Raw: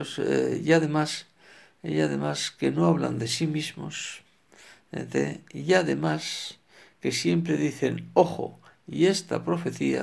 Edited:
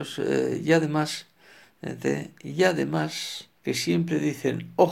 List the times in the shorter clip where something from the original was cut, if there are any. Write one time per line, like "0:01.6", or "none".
0:01.6
0:03.6